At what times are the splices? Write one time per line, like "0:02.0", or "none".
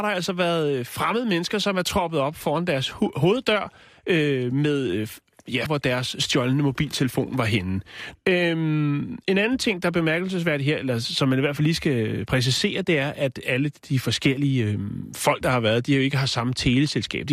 0:05.7
0:08.2